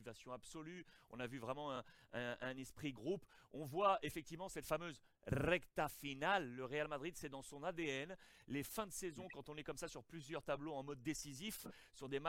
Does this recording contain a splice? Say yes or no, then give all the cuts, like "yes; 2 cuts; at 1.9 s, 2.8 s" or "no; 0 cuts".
no; 0 cuts